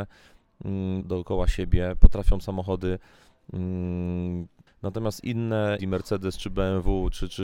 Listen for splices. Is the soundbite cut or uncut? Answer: cut